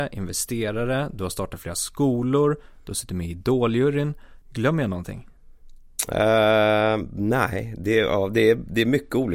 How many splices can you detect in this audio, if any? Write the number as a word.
one